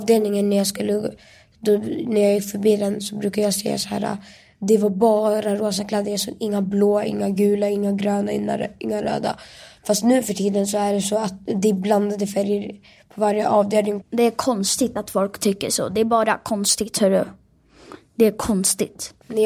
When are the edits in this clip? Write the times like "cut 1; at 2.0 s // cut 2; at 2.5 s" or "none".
cut 1; at 14.0 s